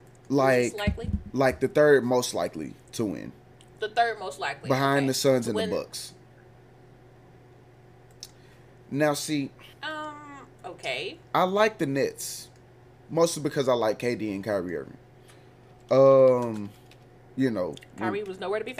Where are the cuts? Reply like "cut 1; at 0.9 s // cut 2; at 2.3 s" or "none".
cut 1; at 9.7 s